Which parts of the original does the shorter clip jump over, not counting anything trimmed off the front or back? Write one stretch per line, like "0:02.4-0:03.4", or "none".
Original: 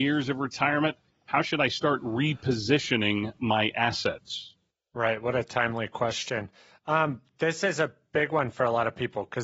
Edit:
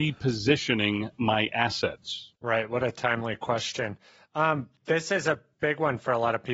0:04.6-0:04.9